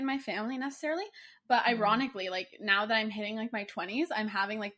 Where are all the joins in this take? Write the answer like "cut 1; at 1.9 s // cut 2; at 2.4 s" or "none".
none

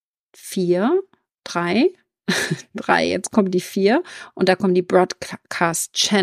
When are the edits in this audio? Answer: none

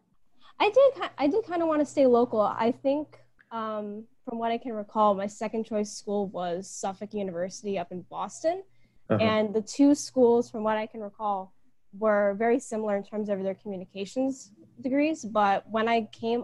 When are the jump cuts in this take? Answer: none

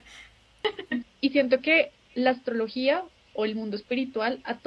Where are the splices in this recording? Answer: cut 1; at 1.0 s

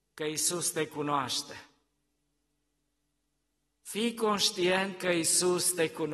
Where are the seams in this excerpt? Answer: none

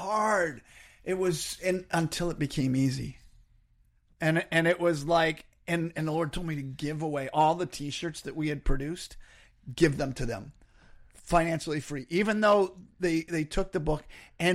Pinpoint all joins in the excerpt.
none

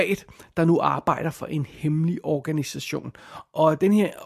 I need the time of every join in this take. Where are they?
none

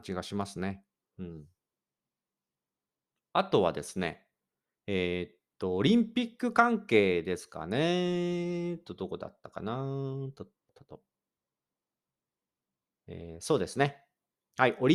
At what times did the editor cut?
cut 1; at 10.7 s

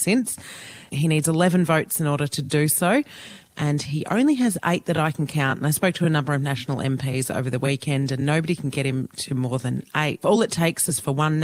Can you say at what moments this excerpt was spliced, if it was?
cut 1; at 0.9 s // cut 2; at 10.2 s

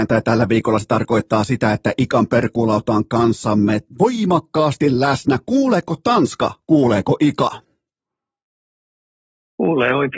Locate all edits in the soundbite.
none

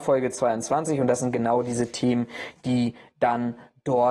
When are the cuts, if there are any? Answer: none

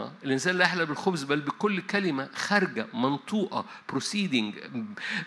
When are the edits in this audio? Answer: none

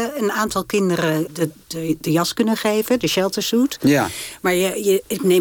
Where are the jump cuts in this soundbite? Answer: cut 1; at 1.3 s

